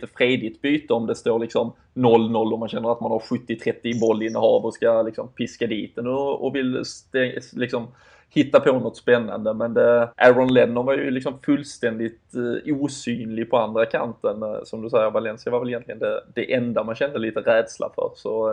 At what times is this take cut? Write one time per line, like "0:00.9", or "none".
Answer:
0:10.1